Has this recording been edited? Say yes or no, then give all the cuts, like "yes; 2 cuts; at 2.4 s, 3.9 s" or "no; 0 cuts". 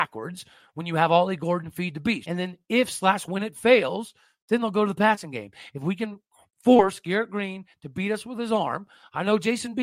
yes; 1 cut; at 2.2 s